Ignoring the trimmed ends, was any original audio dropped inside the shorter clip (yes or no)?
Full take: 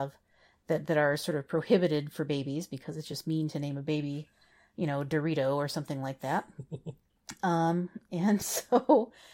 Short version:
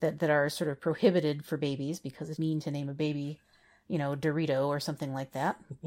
yes